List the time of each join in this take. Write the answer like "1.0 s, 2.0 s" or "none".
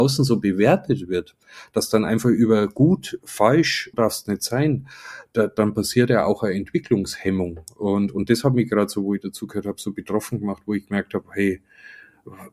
3.9 s